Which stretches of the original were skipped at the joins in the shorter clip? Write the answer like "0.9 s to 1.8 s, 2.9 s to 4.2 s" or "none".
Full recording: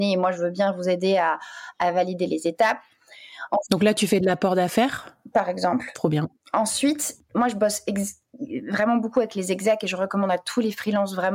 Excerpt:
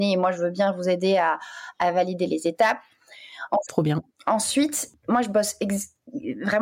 3.7 s to 5.9 s